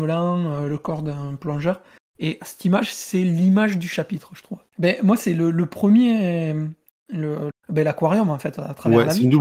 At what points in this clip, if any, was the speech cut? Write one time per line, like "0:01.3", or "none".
0:04.7
0:07.5